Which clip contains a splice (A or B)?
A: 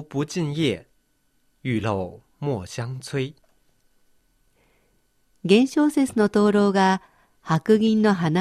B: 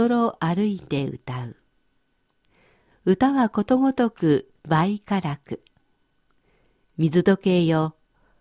B